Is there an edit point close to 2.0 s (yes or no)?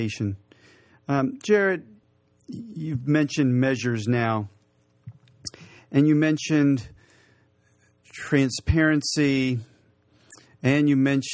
no